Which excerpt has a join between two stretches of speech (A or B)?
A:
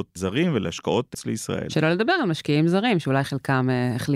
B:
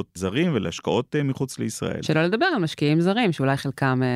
A